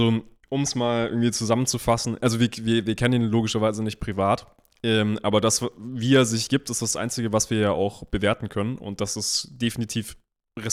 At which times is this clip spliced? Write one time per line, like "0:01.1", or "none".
none